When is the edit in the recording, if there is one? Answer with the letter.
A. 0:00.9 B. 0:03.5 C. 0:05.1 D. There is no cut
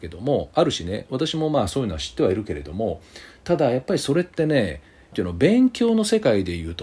C